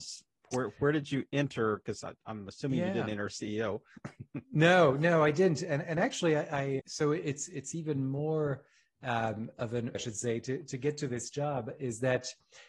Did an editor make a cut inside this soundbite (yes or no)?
yes